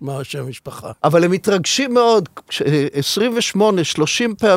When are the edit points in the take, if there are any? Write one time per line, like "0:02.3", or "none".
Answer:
0:00.9